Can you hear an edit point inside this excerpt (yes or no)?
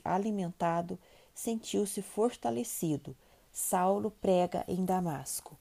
yes